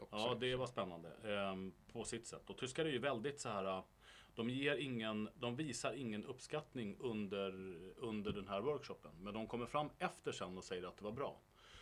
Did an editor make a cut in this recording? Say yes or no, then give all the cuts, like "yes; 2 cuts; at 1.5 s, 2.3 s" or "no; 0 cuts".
no; 0 cuts